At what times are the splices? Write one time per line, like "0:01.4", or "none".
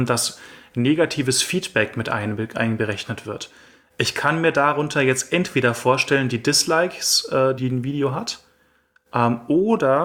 0:07.6